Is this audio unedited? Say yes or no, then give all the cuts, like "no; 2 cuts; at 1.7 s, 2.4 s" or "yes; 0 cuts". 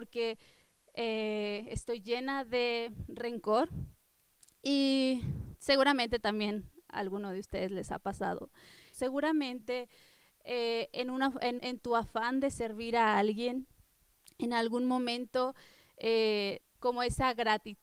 no; 3 cuts; at 8.9 s, 11.6 s, 16.6 s